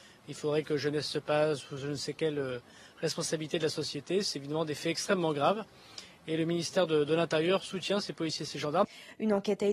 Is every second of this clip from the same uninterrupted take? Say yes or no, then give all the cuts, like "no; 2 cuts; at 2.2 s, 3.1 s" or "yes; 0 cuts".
yes; 0 cuts